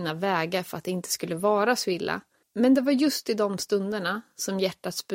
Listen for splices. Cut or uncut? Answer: uncut